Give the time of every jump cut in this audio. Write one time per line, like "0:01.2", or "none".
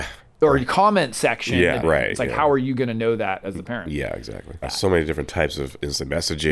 0:01.8
0:04.6